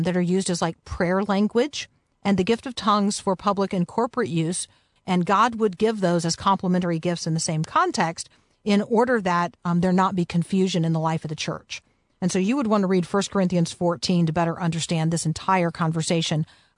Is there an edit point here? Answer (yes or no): yes